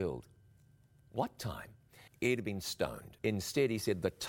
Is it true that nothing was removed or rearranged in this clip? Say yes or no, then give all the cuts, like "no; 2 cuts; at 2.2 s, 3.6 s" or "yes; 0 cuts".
no; 2 cuts; at 2.1 s, 3.2 s